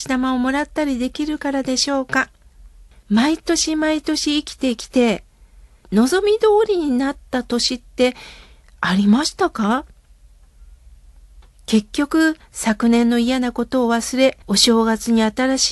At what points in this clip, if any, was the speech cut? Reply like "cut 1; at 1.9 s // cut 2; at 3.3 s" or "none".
cut 1; at 2.9 s // cut 2; at 5.8 s // cut 3; at 14.4 s